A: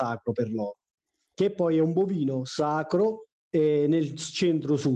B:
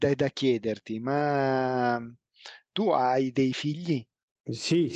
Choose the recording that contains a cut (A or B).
A